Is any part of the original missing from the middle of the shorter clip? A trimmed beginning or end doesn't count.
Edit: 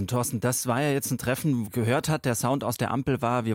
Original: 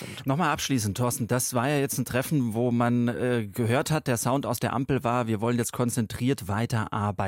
yes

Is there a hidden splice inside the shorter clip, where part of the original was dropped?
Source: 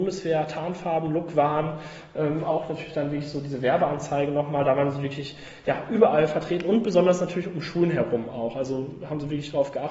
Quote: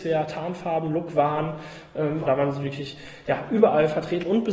yes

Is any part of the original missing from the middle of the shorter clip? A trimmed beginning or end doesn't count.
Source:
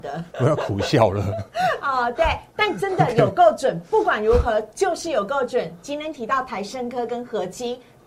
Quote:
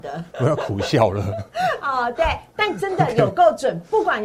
no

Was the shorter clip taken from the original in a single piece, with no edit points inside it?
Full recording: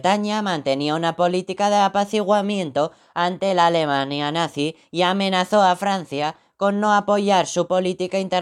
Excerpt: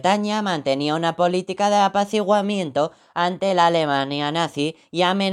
yes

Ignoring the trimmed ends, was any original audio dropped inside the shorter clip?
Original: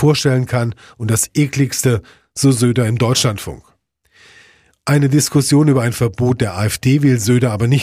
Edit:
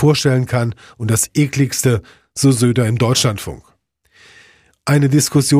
no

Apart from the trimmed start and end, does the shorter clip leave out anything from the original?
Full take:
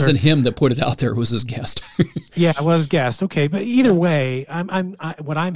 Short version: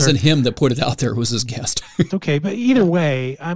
yes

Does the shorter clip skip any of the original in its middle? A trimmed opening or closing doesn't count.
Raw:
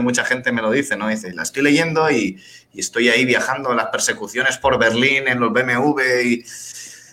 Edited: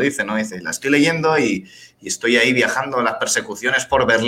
no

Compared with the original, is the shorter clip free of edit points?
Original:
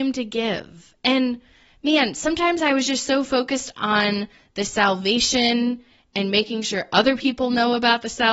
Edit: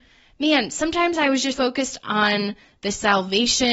no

